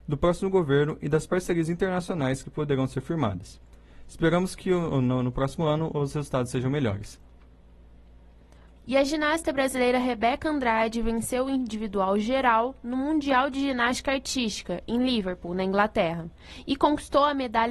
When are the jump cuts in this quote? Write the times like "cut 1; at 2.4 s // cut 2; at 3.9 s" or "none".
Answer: cut 1; at 8.8 s